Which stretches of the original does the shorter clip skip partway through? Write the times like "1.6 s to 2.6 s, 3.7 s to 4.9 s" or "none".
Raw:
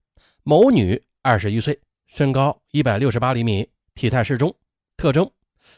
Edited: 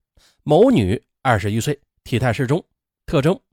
1.9 s to 3.8 s